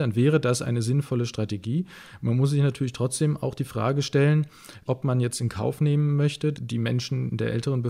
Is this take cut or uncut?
cut